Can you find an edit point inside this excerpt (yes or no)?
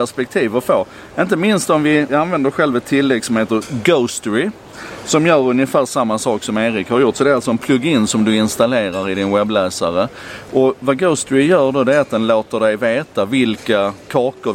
yes